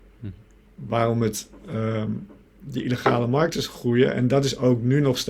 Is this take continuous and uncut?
yes; 0 cuts

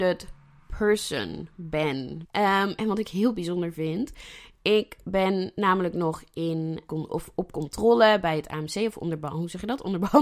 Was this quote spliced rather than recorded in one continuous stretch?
yes; 2 cuts; at 2.2 s, 6.9 s

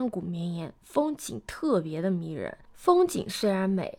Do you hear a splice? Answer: no; 0 cuts

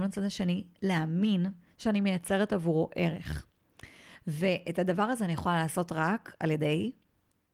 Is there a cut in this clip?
no; 0 cuts

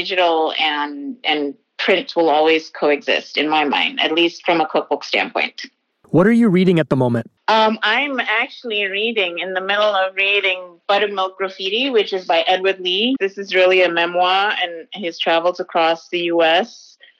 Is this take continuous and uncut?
no; 1 cut; at 13.2 s

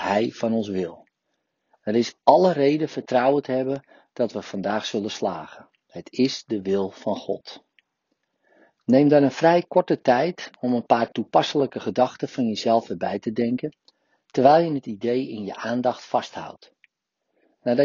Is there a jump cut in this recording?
yes; 1 cut; at 8.8 s

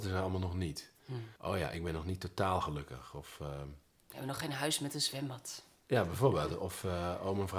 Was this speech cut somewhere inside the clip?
yes; 1 cut; at 1.4 s

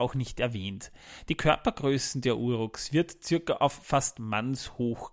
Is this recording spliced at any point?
no; 0 cuts

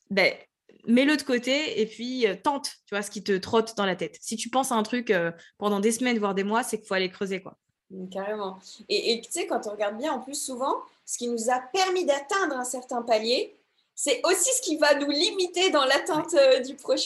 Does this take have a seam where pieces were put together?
no; 0 cuts

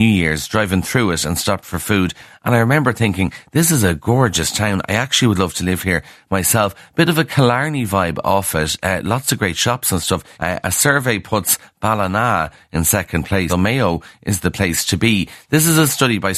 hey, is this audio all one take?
no; 2 cuts; at 10.3 s, 13.5 s

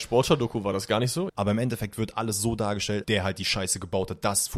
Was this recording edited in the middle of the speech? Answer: yes; 2 cuts; at 1.3 s, 3.0 s

